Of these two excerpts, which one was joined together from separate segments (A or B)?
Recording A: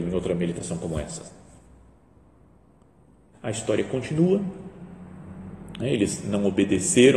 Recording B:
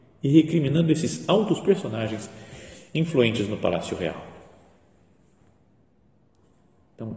A